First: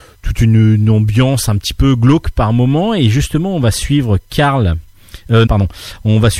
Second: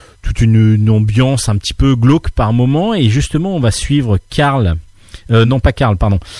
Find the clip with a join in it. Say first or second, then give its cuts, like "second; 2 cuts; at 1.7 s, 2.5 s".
first; 1 cut; at 5.5 s